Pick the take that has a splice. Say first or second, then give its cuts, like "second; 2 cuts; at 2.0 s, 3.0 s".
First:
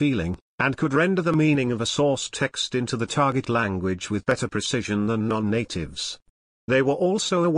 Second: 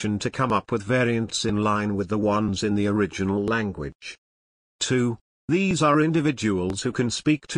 second; 1 cut; at 5.2 s